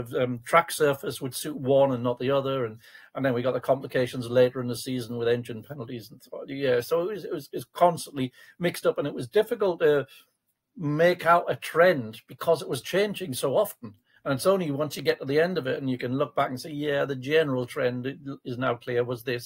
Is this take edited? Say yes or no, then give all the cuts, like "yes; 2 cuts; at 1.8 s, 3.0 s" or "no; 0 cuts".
no; 0 cuts